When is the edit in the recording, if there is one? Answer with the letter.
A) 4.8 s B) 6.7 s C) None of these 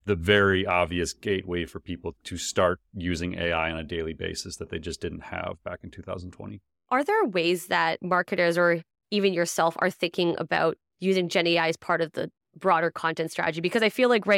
C